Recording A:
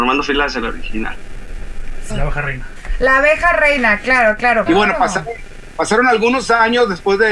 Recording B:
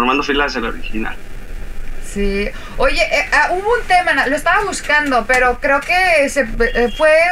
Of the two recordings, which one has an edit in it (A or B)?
A